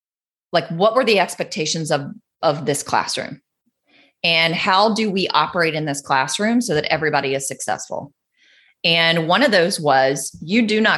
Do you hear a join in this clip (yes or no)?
no